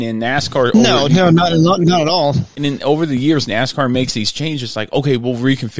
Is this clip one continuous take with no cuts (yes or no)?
yes